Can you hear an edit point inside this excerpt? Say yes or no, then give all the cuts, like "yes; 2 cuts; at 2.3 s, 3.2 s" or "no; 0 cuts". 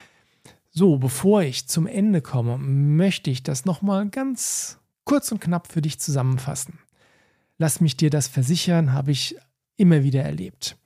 yes; 1 cut; at 7.5 s